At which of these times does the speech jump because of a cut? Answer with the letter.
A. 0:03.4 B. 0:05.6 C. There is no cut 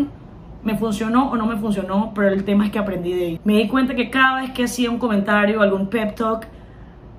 A